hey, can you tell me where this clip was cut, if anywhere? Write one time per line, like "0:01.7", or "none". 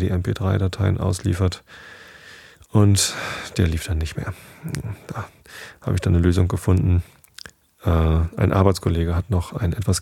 none